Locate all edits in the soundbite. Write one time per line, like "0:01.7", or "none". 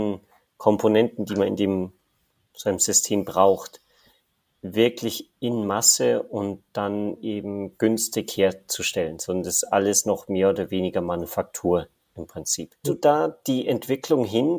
0:12.8